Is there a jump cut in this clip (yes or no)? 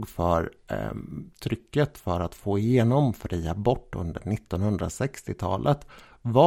no